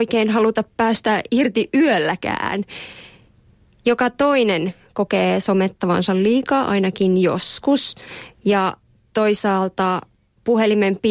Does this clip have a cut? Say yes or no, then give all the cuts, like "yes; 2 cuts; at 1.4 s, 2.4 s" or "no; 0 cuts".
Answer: no; 0 cuts